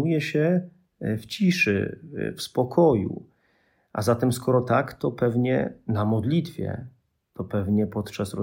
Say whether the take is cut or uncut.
uncut